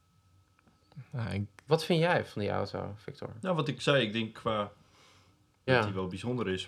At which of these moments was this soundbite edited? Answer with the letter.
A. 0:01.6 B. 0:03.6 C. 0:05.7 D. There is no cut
C